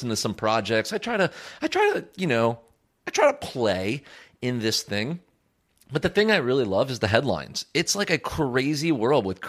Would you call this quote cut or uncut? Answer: uncut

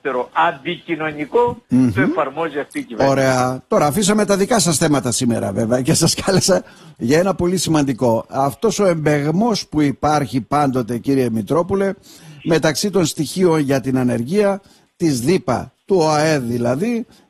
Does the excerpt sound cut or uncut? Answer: uncut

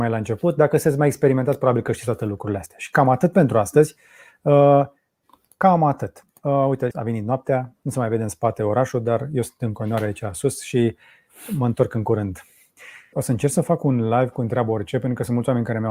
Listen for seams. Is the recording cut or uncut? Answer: cut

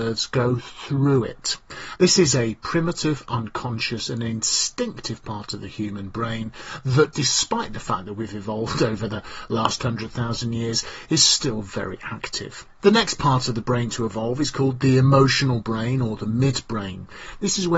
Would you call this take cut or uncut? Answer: cut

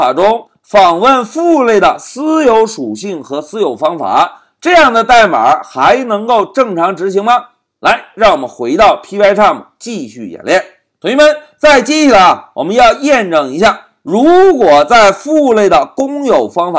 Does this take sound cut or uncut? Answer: uncut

